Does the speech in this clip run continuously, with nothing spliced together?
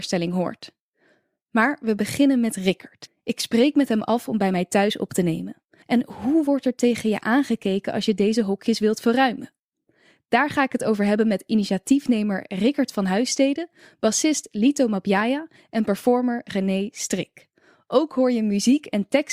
no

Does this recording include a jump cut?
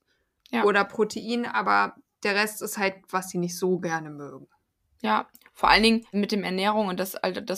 yes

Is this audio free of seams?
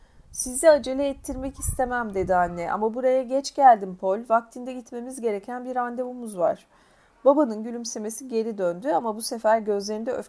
yes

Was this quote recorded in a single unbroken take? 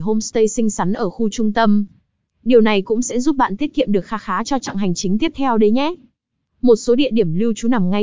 yes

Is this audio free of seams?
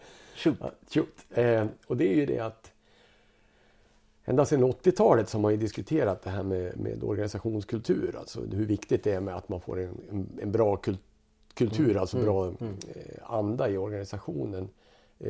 yes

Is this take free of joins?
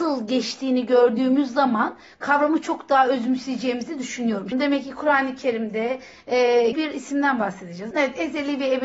no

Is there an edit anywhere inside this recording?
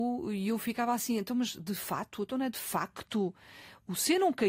no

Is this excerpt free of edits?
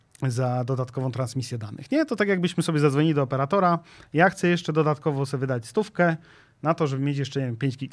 yes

